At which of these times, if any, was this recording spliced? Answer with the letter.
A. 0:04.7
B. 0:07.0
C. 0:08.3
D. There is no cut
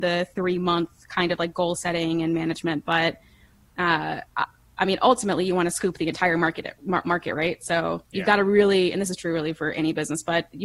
B